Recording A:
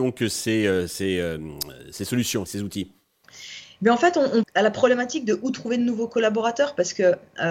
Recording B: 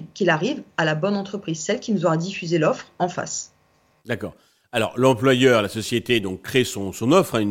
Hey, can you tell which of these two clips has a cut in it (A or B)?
A